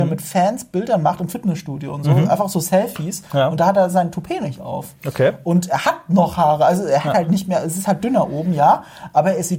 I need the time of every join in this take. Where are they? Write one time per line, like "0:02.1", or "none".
none